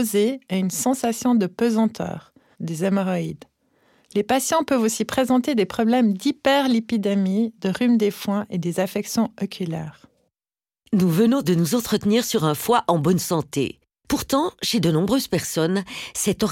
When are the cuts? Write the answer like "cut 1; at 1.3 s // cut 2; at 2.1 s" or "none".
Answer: cut 1; at 2.5 s